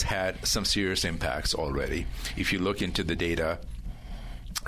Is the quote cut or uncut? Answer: uncut